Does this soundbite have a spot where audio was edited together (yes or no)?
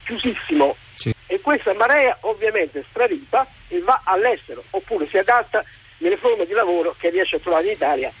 yes